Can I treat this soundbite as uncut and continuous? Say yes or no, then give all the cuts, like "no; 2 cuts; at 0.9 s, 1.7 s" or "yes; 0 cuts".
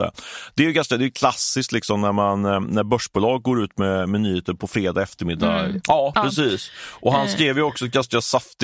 no; 1 cut; at 5.8 s